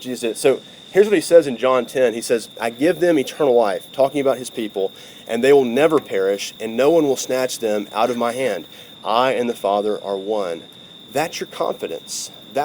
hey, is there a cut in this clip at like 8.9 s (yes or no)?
yes